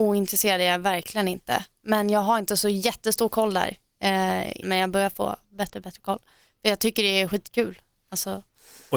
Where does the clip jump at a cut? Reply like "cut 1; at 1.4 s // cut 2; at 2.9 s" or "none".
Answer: cut 1; at 4.6 s

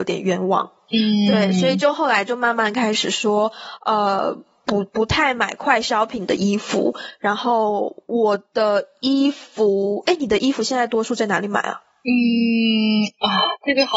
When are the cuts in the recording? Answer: none

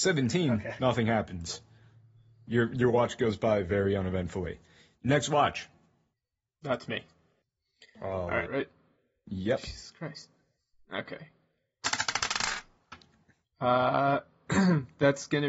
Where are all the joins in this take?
cut 1; at 8.5 s

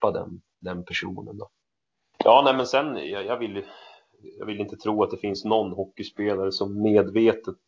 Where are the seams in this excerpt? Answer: cut 1; at 2.1 s

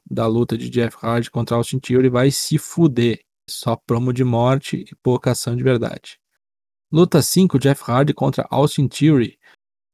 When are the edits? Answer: cut 1; at 3.5 s

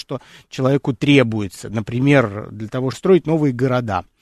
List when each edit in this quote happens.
cut 1; at 2.9 s

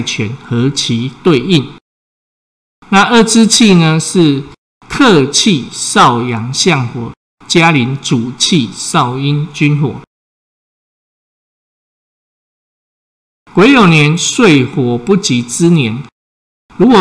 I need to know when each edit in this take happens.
cut 1; at 2.7 s

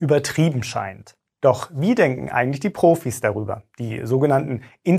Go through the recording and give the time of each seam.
cut 1; at 1.4 s

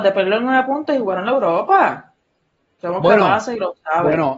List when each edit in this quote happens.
cut 1; at 2.7 s

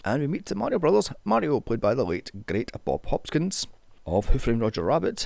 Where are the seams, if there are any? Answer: none

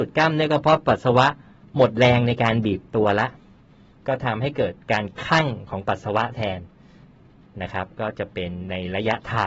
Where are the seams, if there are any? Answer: none

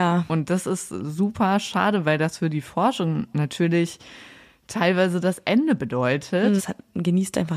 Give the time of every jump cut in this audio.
cut 1; at 6.6 s

